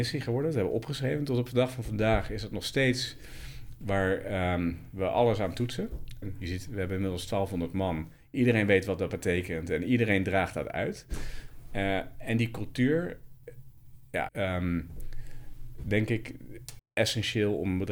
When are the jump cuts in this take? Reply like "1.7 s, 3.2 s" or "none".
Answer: 6.2 s, 14.3 s, 16.8 s

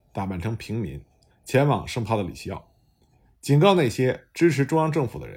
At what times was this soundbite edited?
none

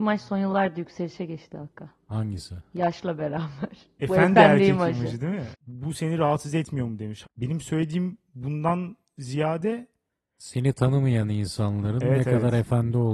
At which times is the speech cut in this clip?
5.5 s, 7.2 s

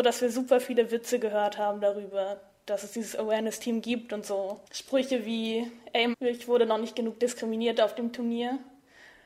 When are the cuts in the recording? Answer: 4.7 s, 6.1 s

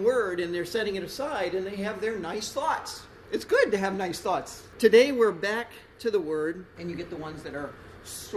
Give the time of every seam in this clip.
4.7 s, 6.8 s

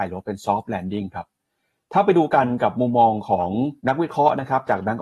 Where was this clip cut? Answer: 3.8 s

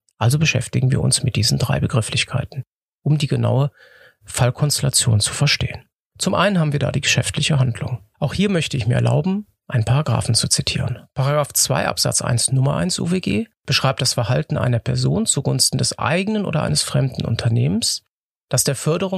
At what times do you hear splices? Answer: 8.1 s, 13.6 s

